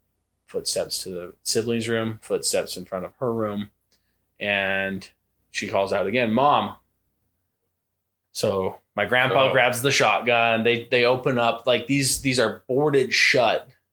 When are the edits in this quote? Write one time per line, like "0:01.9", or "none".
0:08.2